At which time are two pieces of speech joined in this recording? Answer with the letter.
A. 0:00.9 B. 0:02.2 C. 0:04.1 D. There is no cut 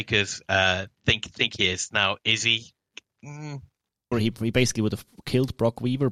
C